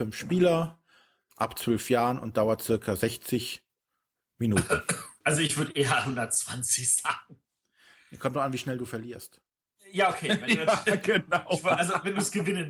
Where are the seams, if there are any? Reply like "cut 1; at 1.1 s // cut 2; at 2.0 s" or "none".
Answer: cut 1; at 5.2 s